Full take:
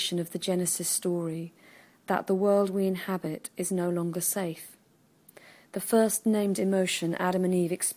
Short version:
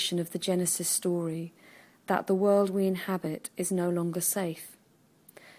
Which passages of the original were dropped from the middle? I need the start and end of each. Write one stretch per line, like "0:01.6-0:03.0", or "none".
none